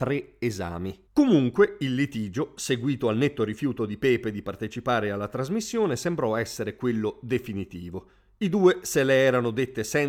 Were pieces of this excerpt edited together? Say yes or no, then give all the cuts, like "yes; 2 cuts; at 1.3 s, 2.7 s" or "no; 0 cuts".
yes; 1 cut; at 1.1 s